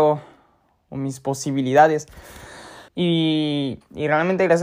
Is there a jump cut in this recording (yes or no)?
yes